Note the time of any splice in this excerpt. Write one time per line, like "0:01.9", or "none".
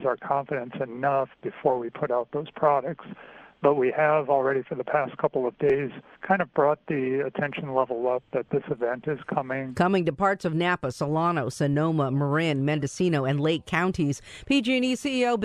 none